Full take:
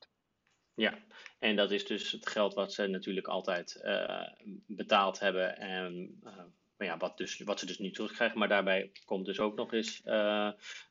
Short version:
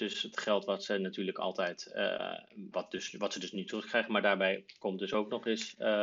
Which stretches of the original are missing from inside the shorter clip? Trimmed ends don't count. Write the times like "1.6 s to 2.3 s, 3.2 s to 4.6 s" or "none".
4.6 s to 7.0 s